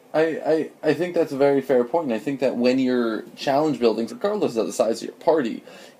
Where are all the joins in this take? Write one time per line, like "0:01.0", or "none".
0:04.1